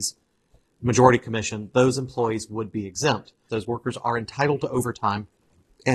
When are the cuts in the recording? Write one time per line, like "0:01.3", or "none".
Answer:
0:03.5